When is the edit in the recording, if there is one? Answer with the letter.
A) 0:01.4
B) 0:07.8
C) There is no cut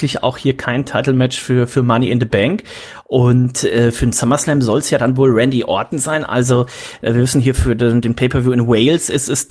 C